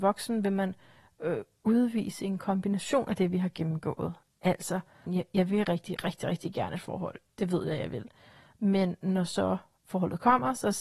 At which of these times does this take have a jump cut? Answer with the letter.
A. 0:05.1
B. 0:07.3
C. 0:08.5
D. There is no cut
A